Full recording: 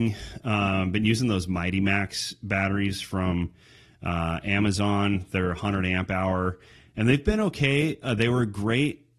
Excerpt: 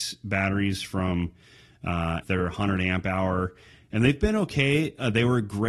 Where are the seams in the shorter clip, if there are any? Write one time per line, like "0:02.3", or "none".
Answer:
0:02.2